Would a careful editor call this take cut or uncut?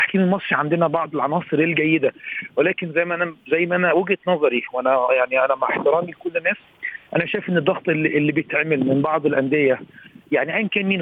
uncut